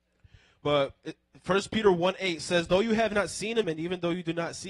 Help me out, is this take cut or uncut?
cut